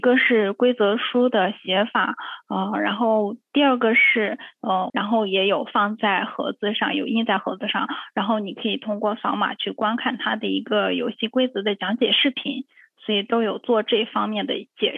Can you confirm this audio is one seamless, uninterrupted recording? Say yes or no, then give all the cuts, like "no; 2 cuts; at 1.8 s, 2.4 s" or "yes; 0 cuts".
no; 1 cut; at 4.9 s